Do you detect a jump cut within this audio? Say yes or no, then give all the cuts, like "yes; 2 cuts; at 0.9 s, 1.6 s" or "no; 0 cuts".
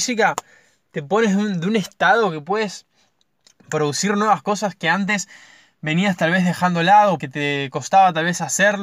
yes; 1 cut; at 7.2 s